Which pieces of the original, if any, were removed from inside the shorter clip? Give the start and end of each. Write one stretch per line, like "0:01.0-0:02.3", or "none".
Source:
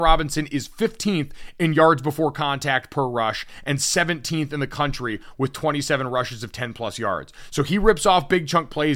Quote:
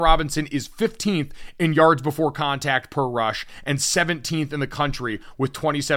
none